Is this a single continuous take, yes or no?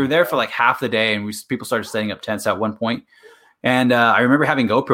yes